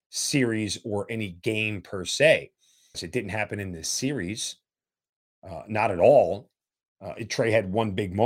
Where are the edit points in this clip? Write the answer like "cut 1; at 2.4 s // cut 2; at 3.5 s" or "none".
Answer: cut 1; at 2.9 s